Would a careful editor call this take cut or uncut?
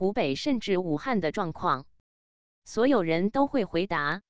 cut